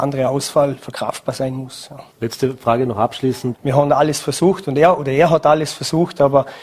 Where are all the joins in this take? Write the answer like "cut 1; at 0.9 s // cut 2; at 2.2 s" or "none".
cut 1; at 2.1 s // cut 2; at 3.5 s